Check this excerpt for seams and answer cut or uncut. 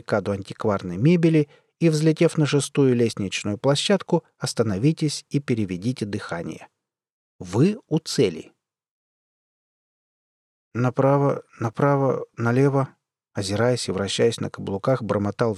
uncut